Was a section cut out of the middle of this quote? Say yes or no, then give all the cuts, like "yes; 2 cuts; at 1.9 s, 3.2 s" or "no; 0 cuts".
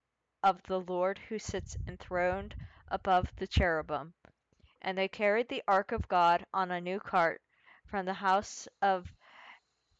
no; 0 cuts